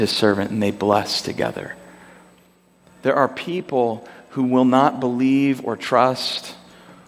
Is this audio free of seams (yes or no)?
yes